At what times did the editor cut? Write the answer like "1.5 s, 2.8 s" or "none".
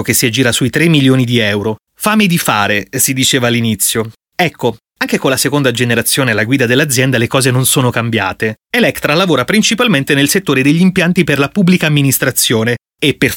1.8 s, 8.6 s